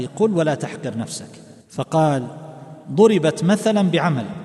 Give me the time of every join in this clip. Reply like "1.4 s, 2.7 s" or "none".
1.6 s